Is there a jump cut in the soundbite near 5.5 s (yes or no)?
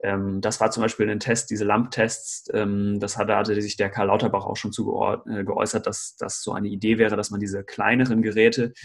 no